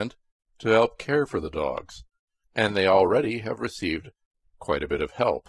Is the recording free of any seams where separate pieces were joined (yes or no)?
yes